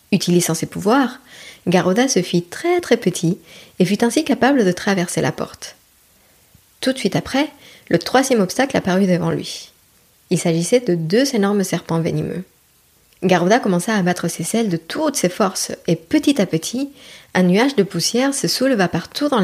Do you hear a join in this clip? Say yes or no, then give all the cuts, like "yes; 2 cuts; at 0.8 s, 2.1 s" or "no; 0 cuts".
no; 0 cuts